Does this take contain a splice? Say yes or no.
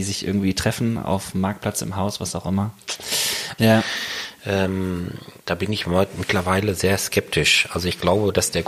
yes